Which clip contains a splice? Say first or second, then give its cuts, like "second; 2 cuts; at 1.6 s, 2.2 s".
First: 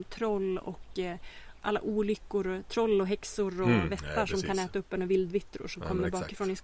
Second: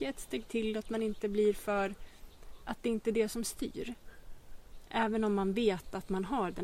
first; 1 cut; at 1.6 s